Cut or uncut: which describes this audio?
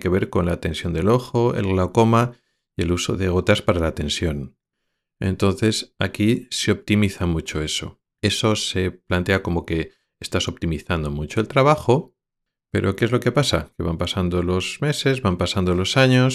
cut